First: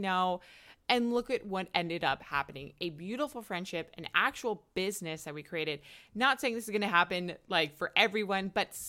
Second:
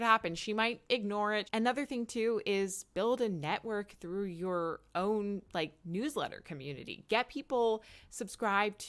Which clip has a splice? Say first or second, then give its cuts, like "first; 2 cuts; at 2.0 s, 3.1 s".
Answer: second; 1 cut; at 1.5 s